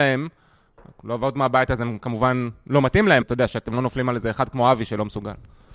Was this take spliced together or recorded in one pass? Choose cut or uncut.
cut